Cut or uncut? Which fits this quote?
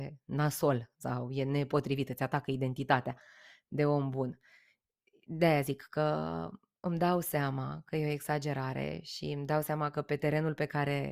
uncut